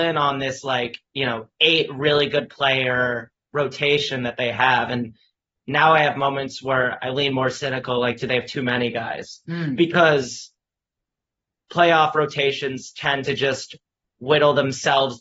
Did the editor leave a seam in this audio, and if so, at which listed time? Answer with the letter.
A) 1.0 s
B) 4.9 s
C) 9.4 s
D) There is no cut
D